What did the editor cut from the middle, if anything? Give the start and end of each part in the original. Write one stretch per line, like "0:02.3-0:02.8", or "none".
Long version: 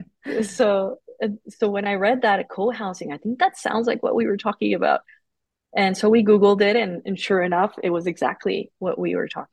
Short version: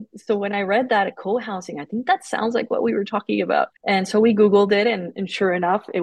0:05.1-0:05.7